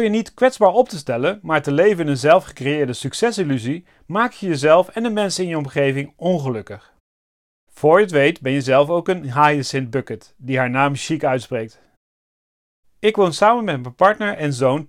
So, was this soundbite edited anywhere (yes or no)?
no